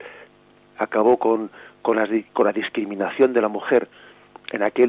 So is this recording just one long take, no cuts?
yes; 0 cuts

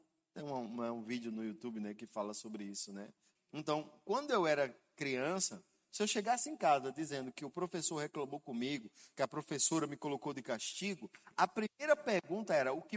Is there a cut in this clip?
yes; 1 cut; at 3.4 s

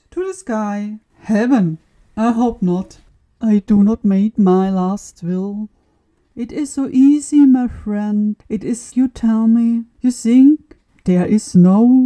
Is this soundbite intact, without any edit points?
no; 2 cuts; at 1.1 s, 8.9 s

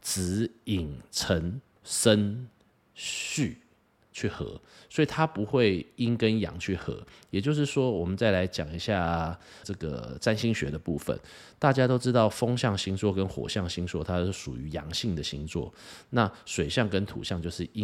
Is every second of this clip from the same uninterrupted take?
no; 2 cuts; at 1.8 s, 9.6 s

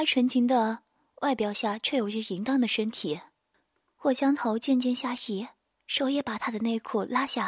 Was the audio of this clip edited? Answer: no; 0 cuts

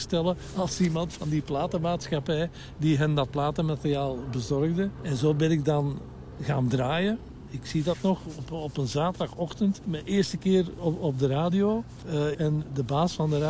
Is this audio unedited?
no; 1 cut; at 12.3 s

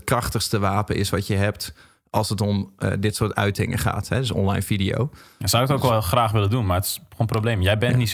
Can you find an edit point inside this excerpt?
no; 0 cuts

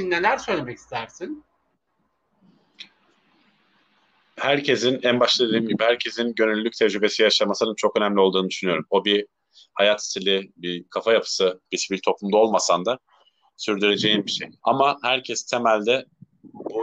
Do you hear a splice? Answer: yes; 3 cuts; at 8.9 s, 11.7 s, 14.6 s

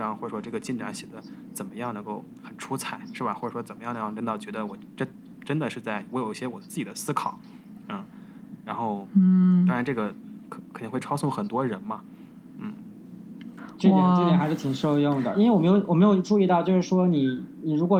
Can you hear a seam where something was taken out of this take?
yes; 1 cut; at 15.3 s

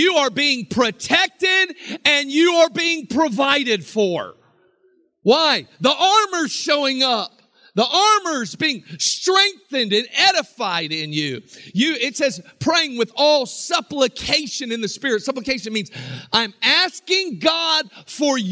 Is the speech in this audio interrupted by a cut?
no; 0 cuts

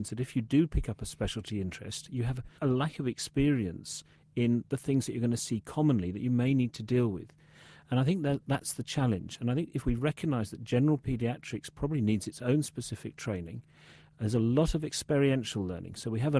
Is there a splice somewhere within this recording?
no; 0 cuts

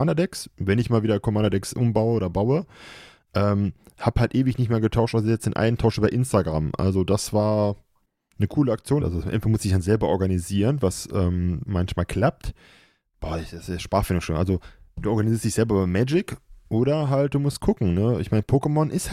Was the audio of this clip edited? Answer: yes; 2 cuts; at 9.0 s, 11.7 s

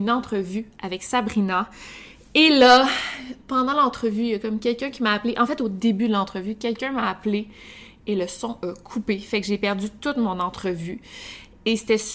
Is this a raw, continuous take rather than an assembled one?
yes; 0 cuts

